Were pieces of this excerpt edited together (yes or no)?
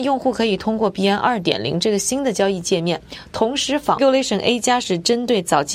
yes